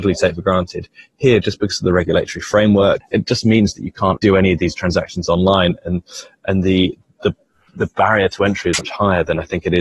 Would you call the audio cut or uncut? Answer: cut